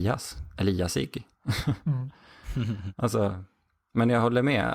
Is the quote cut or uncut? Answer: uncut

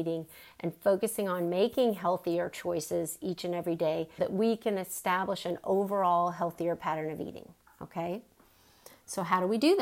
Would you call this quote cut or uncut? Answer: cut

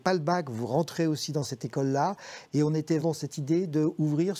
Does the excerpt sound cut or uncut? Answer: cut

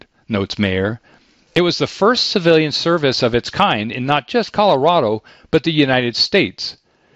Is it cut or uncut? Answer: uncut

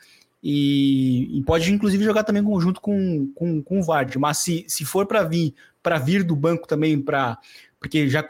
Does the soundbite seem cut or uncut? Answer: uncut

